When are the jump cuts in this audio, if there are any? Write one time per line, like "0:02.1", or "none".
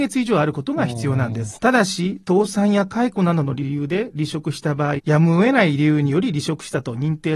0:01.6
0:05.0